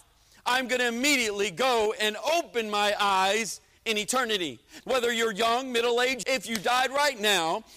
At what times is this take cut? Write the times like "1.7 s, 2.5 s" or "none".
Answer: 4.8 s, 6.2 s